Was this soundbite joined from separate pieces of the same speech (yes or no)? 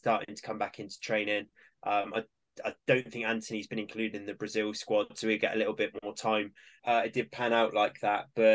yes